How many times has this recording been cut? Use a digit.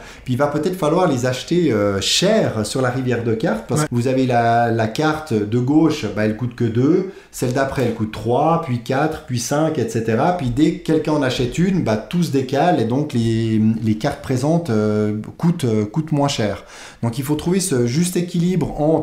1